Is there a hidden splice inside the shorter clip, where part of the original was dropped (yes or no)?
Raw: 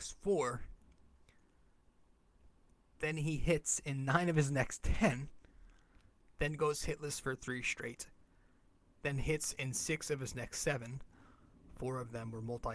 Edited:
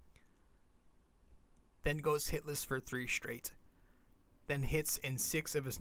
yes